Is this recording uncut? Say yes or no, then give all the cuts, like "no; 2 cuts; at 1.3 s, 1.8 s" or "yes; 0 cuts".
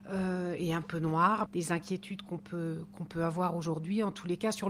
no; 1 cut; at 1.5 s